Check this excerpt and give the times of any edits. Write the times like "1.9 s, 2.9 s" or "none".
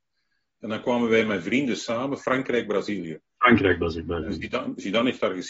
none